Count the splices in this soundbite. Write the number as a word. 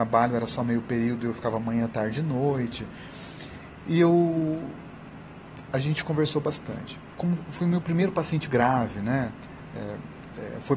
three